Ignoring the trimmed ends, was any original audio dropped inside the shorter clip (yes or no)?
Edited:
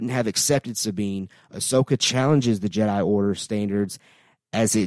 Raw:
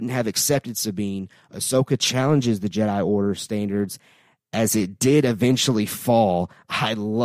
no